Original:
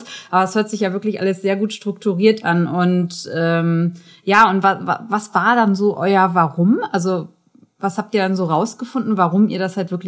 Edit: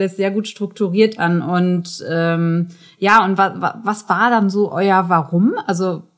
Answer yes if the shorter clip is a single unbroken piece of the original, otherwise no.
yes